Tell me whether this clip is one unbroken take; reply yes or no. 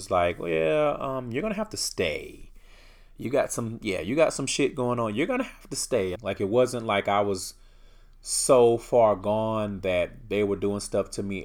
no